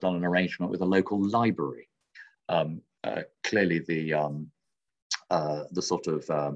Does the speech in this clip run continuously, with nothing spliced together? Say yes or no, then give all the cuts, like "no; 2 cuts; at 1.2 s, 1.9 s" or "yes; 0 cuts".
no; 1 cut; at 2.4 s